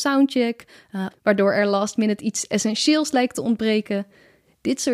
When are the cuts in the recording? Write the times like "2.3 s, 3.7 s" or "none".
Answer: 1.1 s